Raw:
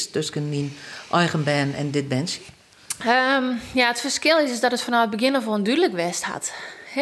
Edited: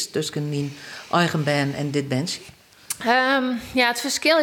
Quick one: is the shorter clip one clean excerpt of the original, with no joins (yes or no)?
yes